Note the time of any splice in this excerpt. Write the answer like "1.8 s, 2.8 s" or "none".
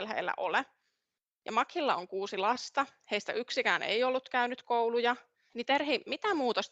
5.5 s

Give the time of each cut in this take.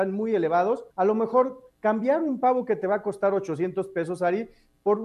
0.9 s

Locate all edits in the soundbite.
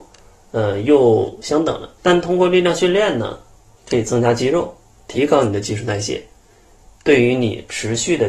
2.0 s

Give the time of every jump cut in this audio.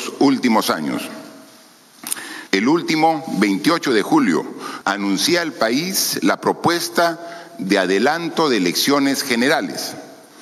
2.5 s, 4.8 s

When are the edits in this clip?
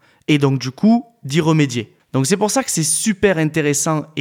none

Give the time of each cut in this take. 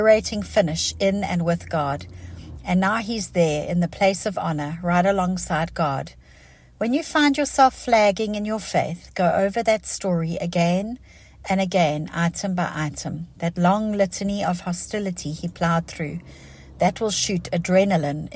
2.5 s

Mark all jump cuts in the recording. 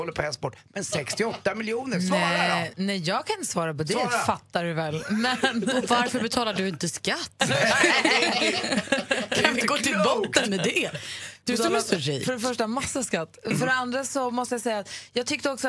none

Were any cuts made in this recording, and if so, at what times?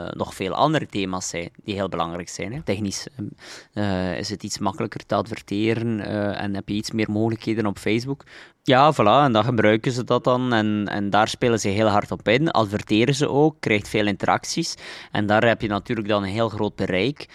2.6 s, 8.5 s

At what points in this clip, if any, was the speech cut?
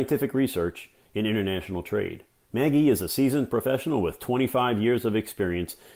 2.4 s

